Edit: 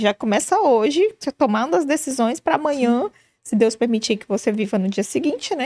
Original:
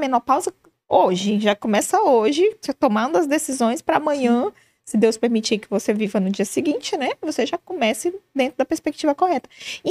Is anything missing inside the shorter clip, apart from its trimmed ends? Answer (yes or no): no